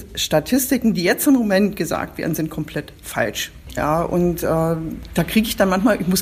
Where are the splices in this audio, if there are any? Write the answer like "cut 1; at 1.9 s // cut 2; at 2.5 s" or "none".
cut 1; at 3.8 s